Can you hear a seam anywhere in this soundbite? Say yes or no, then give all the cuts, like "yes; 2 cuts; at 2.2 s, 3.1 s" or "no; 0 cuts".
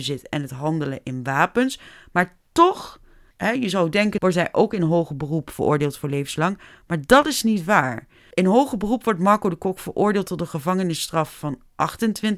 no; 0 cuts